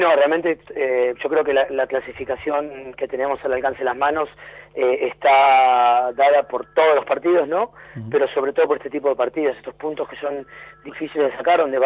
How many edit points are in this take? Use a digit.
0